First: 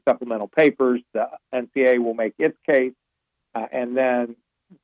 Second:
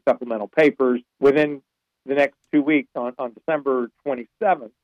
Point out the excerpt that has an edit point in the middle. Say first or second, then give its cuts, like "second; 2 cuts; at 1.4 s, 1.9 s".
second; 1 cut; at 1.1 s